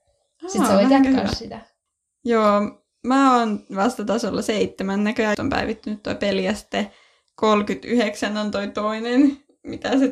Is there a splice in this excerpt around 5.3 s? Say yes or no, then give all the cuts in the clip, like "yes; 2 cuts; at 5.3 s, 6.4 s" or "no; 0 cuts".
yes; 1 cut; at 5.3 s